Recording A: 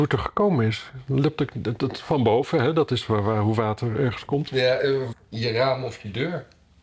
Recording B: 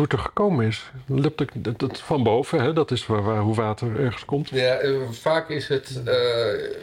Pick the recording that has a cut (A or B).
A